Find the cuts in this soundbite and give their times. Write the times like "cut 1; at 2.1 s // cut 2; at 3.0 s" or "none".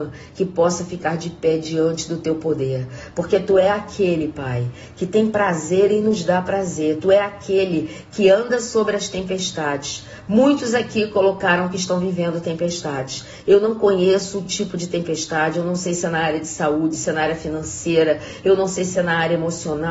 none